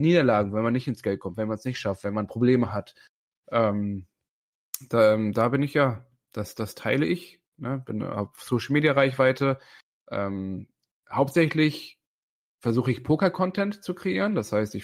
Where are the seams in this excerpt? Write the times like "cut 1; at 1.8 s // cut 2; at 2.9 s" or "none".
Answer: none